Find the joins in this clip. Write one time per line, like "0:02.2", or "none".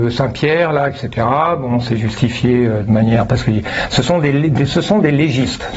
none